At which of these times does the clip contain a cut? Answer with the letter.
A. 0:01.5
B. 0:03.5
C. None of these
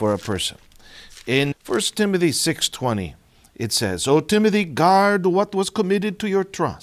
A